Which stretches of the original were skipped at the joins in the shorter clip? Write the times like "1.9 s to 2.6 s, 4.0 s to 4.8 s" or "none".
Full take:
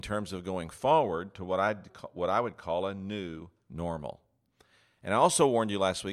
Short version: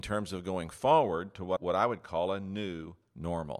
1.6 s to 2.1 s

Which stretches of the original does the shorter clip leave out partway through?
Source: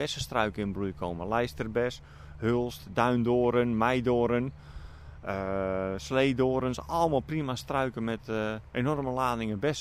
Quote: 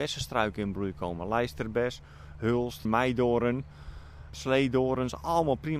2.9 s to 3.7 s, 5.2 s to 6.0 s

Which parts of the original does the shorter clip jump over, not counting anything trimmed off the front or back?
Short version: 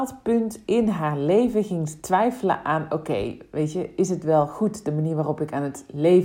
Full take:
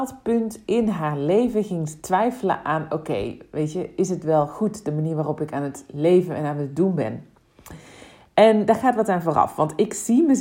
none

